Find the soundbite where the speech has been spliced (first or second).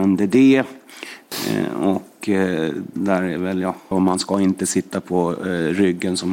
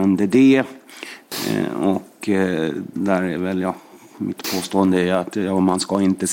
first